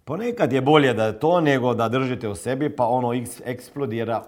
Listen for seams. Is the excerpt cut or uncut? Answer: uncut